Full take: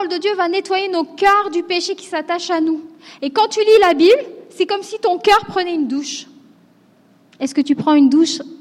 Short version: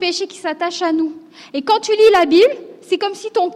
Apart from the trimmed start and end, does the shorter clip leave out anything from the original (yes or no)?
no